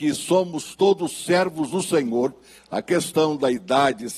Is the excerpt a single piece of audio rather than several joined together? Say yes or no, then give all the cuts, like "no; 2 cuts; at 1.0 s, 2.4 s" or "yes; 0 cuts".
no; 1 cut; at 2.6 s